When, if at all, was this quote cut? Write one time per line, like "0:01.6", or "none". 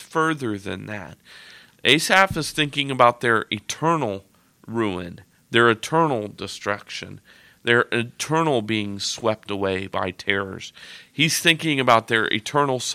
none